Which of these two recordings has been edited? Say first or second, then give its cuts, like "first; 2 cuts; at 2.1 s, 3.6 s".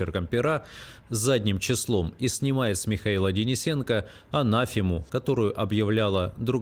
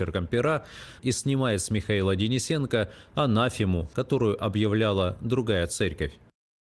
second; 1 cut; at 1.0 s